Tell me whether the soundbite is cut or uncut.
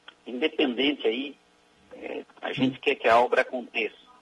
cut